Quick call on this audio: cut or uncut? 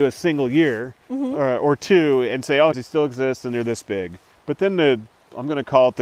cut